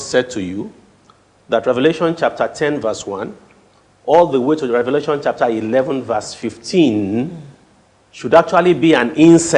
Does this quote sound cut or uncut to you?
uncut